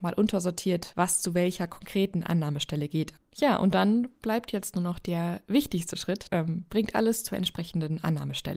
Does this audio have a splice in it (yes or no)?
yes